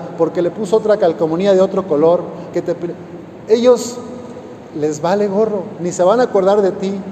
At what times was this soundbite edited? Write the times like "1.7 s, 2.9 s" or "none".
2.5 s, 5.8 s